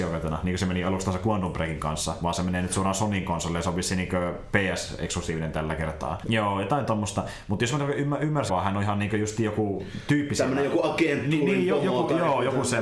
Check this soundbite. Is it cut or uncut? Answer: cut